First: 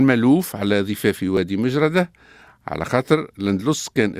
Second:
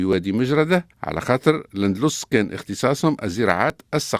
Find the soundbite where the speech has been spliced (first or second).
second